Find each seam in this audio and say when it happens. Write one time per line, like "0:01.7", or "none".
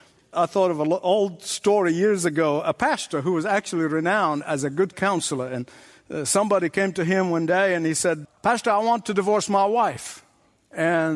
0:08.2